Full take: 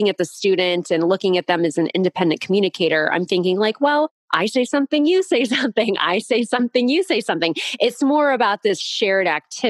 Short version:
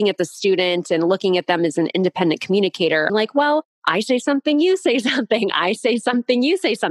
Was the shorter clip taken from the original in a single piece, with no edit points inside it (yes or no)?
no